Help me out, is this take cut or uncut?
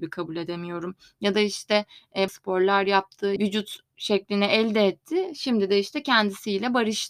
cut